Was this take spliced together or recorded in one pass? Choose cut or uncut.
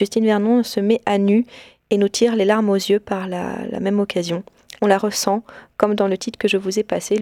cut